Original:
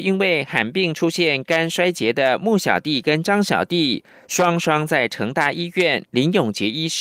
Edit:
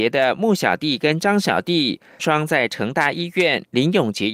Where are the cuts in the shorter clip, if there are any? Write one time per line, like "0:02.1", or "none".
0:02.2